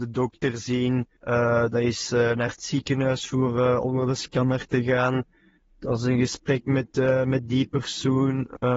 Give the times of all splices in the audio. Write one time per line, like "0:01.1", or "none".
0:01.2